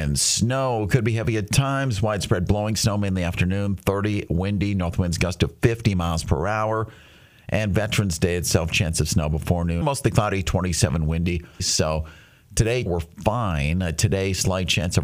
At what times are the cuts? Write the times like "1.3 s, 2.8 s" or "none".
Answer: 9.8 s, 11.6 s, 12.9 s